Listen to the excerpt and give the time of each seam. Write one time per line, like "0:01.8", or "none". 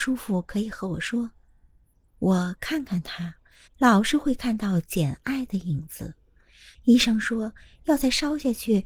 0:02.0
0:03.7
0:06.7